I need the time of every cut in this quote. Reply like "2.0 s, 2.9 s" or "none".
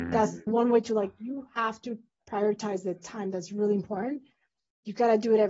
none

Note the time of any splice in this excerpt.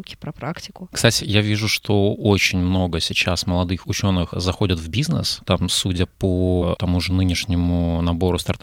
1.2 s

